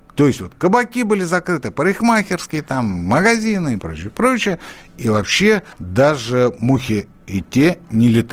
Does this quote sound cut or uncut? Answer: cut